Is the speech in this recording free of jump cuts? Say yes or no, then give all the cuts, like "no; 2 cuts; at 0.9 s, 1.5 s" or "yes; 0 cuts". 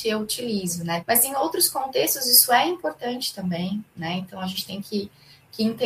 no; 1 cut; at 1.0 s